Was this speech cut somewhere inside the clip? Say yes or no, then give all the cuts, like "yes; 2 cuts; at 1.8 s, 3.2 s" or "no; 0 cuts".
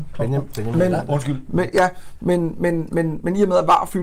no; 0 cuts